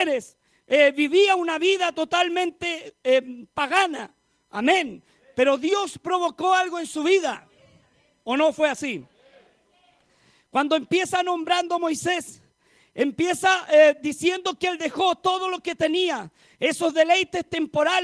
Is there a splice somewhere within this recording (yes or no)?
no